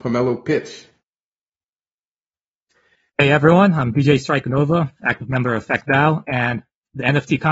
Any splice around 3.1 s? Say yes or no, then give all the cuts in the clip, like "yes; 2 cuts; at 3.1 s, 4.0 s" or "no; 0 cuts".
no; 0 cuts